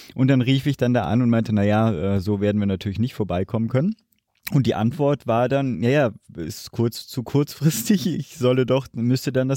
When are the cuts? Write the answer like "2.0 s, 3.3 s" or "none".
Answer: none